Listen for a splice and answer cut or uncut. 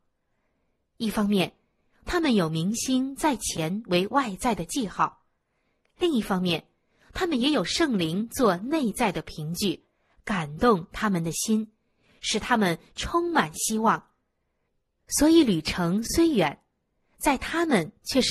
uncut